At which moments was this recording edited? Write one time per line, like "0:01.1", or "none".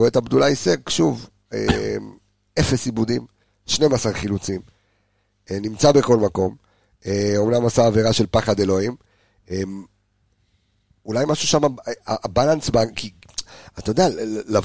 none